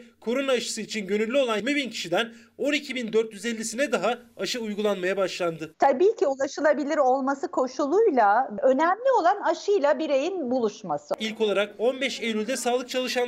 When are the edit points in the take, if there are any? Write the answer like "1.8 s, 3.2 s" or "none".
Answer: 1.6 s, 5.7 s